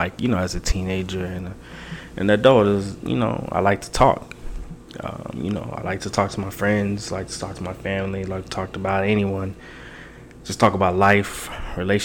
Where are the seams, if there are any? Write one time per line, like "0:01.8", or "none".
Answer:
none